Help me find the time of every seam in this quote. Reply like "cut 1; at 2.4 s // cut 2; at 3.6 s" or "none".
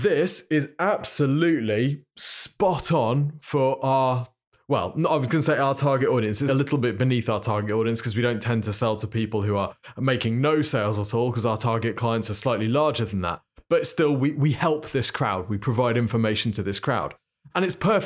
cut 1; at 6.5 s